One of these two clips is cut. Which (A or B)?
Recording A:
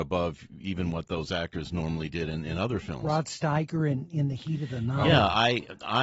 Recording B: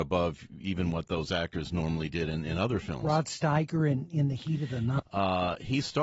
B